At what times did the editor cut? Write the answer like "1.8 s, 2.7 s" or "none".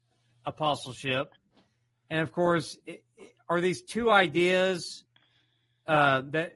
none